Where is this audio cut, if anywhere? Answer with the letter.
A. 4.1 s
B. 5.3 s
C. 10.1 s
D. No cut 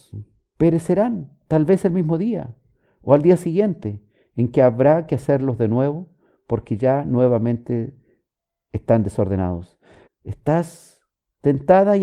C